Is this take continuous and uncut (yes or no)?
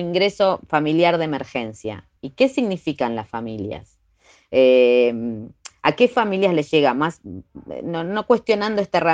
yes